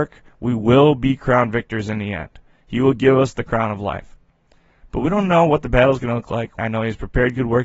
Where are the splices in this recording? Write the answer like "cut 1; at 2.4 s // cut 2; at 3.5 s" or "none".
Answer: cut 1; at 6.6 s